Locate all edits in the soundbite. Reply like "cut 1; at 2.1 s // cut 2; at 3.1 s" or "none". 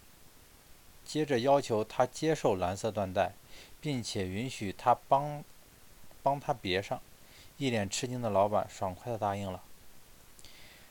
none